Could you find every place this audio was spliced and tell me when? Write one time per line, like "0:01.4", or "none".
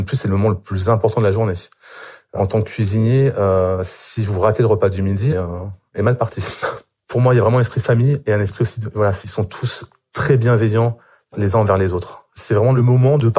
0:05.3